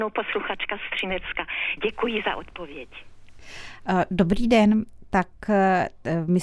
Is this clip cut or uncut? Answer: cut